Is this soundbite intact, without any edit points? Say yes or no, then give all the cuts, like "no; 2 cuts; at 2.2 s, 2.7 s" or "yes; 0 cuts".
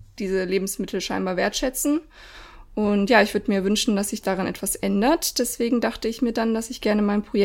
yes; 0 cuts